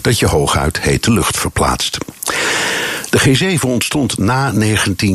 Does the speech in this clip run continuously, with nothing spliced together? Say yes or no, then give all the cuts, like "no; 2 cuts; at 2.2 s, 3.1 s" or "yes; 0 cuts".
yes; 0 cuts